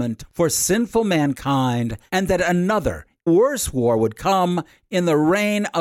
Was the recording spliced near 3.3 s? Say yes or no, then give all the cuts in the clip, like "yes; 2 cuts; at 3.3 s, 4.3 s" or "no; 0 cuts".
yes; 1 cut; at 3.3 s